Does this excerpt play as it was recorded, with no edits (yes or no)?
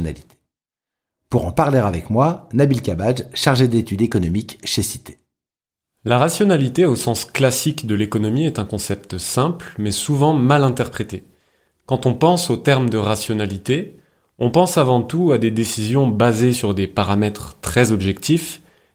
yes